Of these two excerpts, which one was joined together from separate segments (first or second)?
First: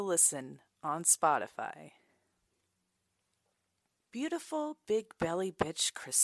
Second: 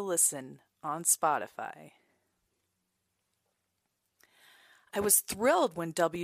first